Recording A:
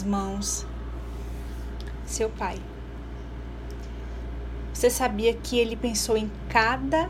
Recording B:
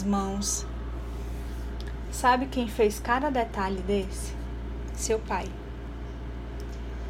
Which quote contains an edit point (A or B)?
A